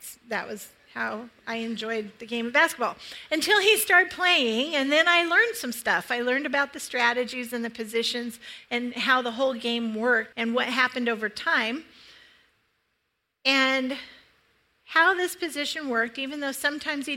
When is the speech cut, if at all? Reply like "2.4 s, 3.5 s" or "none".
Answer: 10.3 s, 13.3 s